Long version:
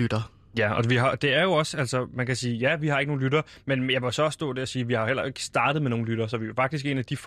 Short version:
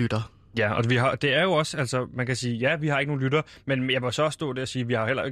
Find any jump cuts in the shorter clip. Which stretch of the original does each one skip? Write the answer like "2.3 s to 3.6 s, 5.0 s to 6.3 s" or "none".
none